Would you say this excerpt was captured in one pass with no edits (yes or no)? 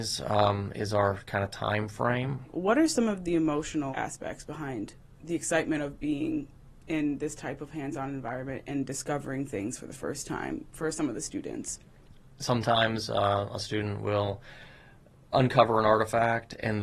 yes